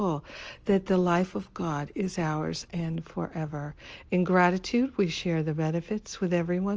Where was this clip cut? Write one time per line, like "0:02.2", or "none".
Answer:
0:02.7